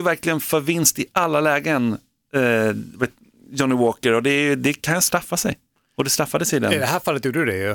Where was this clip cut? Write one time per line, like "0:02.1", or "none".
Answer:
none

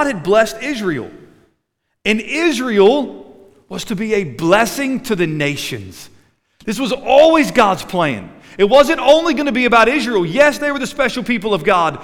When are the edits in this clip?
none

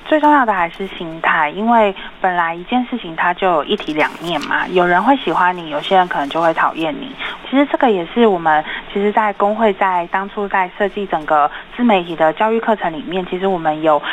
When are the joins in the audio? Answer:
0:07.4

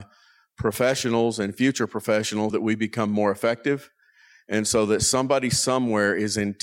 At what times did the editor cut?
0:02.5

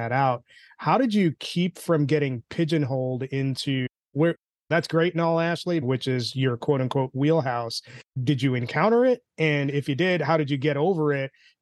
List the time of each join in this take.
0:05.8

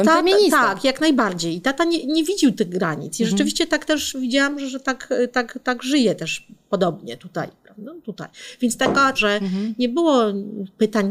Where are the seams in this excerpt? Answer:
0:09.1

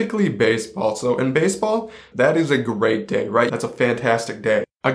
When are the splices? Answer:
0:02.1
0:03.5

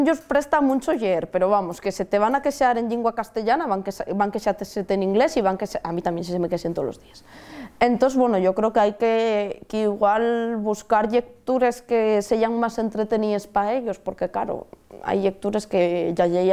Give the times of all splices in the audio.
none

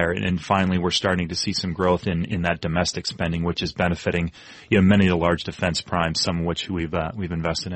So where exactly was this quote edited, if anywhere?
none

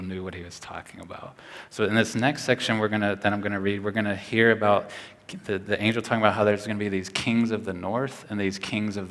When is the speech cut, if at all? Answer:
0:01.7

